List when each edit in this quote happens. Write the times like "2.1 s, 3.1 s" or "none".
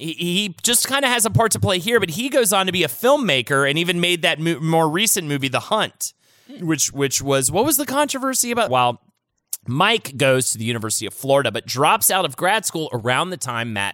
8.7 s